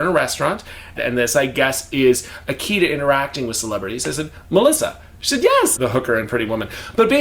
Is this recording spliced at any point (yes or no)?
yes